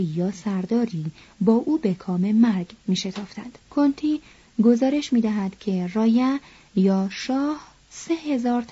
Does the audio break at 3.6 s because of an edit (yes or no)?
yes